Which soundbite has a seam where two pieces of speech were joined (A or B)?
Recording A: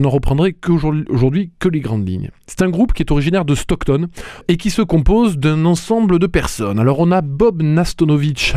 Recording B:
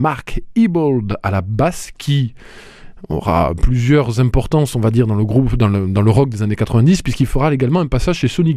A